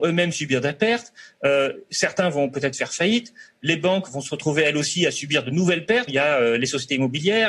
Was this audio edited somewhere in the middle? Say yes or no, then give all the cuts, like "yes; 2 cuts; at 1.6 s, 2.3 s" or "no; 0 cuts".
yes; 1 cut; at 6.1 s